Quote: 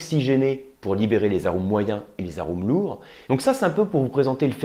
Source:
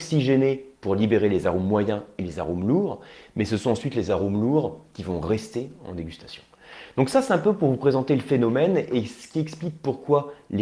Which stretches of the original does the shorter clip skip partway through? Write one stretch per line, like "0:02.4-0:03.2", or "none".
0:03.3-0:06.9